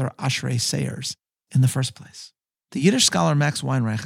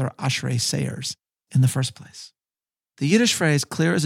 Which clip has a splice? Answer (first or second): first